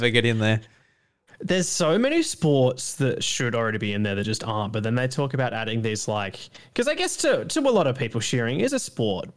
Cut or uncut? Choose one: uncut